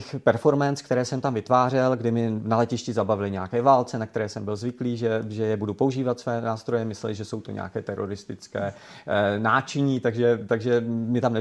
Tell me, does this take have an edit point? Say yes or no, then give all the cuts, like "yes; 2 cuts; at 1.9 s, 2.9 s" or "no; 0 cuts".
no; 0 cuts